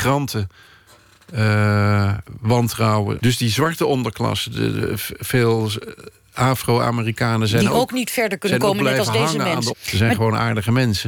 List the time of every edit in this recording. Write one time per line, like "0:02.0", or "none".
0:03.2
0:09.7